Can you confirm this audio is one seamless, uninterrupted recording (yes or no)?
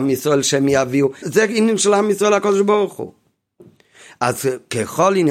no